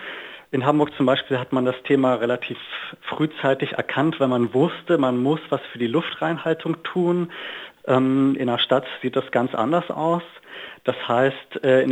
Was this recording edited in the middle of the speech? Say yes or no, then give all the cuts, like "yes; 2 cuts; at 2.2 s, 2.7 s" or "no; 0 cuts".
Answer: yes; 1 cut; at 7.8 s